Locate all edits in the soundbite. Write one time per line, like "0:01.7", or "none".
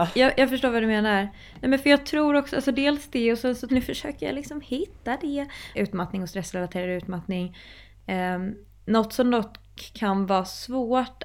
0:03.7
0:05.7